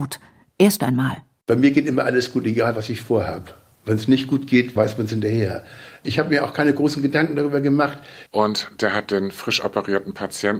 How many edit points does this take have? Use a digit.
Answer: 2